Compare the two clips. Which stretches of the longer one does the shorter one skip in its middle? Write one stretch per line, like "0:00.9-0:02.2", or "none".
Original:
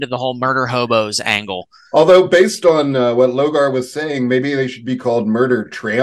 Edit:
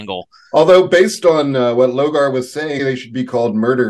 0:04.2-0:04.5

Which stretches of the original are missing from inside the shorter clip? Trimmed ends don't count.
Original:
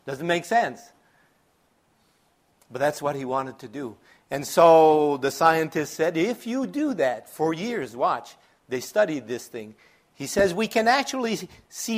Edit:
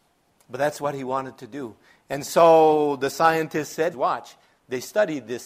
0:06.1-0:07.9

